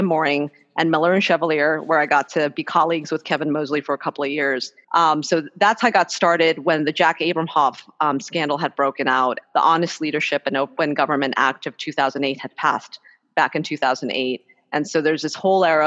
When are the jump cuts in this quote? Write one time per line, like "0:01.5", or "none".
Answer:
0:04.8
0:09.4

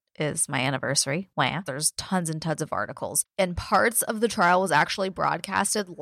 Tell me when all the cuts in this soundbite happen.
0:01.7

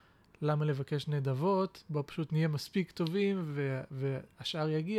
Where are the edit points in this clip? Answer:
none

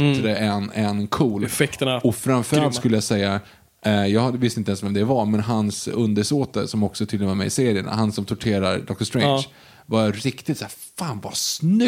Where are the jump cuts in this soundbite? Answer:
none

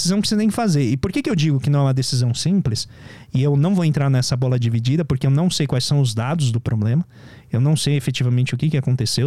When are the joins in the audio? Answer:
none

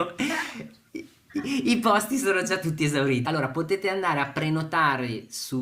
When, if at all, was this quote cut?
0:03.2

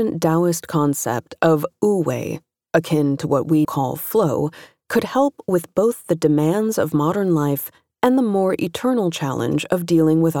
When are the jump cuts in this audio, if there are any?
0:03.6

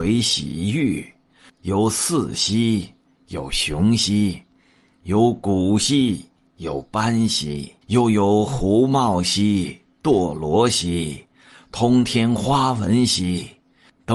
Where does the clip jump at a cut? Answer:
0:01.5
0:07.8

